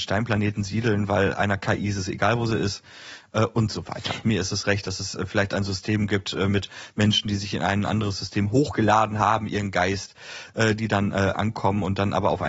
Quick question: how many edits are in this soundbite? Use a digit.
1